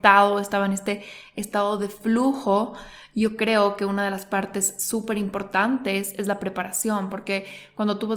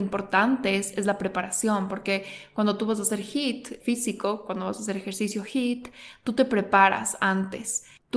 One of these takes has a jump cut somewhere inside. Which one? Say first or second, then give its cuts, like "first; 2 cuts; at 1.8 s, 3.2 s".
second; 1 cut; at 3.8 s